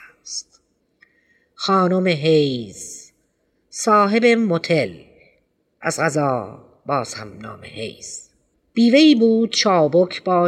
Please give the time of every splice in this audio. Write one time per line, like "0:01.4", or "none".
none